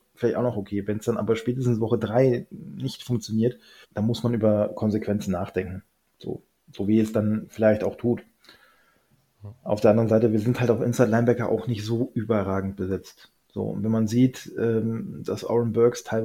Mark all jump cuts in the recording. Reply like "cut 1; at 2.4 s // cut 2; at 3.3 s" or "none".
cut 1; at 3.8 s